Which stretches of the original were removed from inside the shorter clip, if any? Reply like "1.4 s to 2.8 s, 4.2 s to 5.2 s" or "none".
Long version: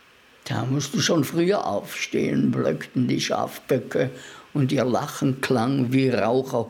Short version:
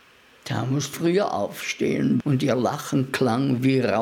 0.9 s to 1.3 s, 2.5 s to 4.5 s